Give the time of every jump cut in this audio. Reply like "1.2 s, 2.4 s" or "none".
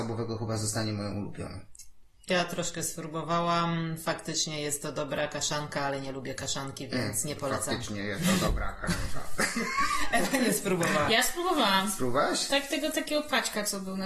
none